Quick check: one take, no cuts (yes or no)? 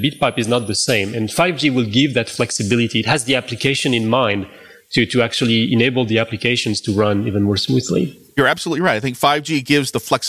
yes